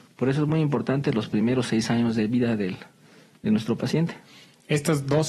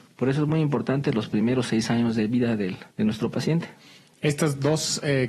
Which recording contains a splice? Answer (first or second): second